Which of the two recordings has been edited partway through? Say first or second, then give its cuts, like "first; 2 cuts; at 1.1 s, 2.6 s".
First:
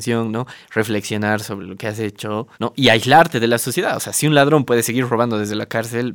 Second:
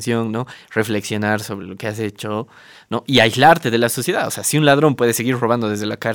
first; 1 cut; at 2.5 s